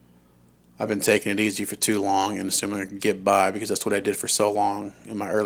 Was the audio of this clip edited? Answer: yes; 1 cut; at 3.0 s

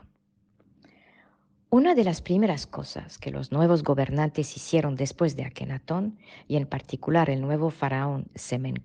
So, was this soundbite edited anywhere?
no; 0 cuts

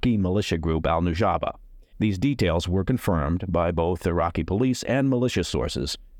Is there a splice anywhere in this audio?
yes; 1 cut; at 1.9 s

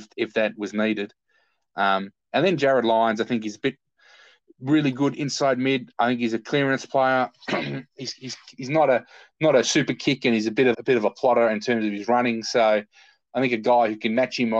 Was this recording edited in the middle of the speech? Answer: yes; 1 cut; at 10.7 s

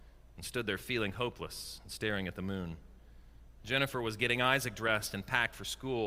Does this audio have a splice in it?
yes; 1 cut; at 3.6 s

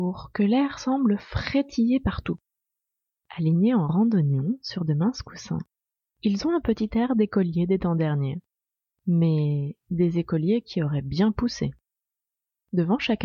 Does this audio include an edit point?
yes; 1 cut; at 3.1 s

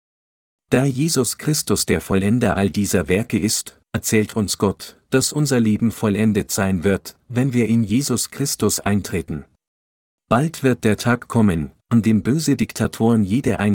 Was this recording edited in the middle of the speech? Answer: yes; 1 cut; at 10.2 s

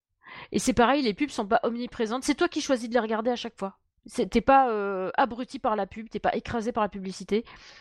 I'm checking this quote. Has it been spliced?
no; 0 cuts

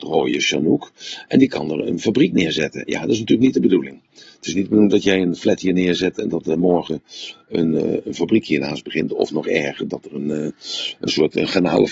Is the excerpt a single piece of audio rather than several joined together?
yes; 0 cuts

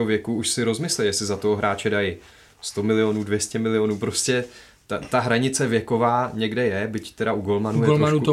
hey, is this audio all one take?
yes; 0 cuts

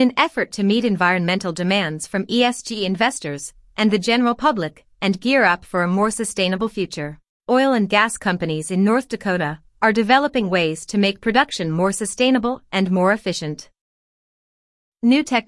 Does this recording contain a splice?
no; 0 cuts

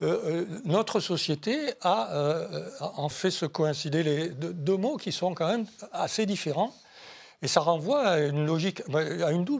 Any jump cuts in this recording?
yes; 1 cut; at 3.1 s

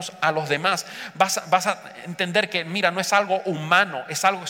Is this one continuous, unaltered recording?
yes; 0 cuts

